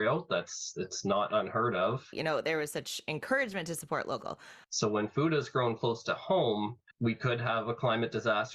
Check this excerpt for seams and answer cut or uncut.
cut